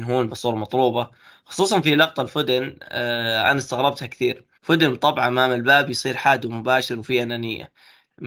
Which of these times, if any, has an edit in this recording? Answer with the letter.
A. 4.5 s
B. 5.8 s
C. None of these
A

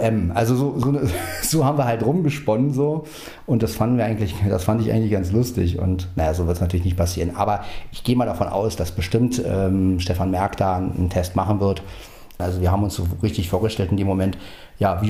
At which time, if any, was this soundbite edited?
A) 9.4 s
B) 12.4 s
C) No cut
B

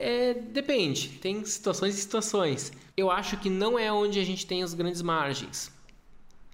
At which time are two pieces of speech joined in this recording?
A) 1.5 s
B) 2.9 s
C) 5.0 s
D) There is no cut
B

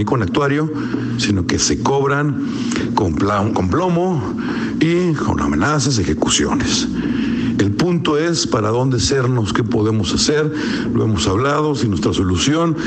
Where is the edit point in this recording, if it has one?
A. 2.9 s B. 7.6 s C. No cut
B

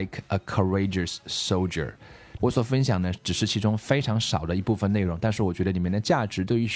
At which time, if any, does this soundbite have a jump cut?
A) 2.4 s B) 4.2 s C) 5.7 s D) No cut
A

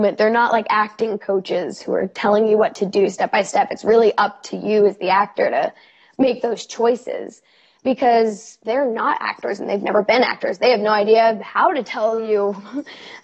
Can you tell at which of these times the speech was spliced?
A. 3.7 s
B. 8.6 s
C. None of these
B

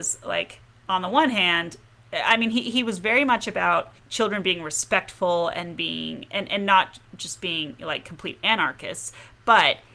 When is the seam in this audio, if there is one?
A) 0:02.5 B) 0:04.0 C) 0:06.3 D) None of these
B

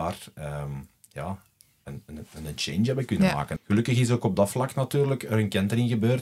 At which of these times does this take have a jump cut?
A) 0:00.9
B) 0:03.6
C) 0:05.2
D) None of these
B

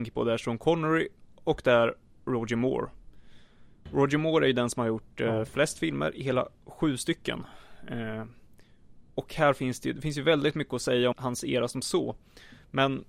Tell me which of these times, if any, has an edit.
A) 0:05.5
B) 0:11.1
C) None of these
B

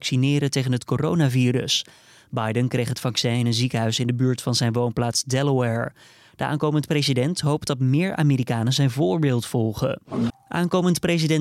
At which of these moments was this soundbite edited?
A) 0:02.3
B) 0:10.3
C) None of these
B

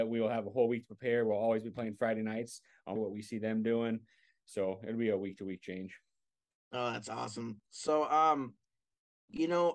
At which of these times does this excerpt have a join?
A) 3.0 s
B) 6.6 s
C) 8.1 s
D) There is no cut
A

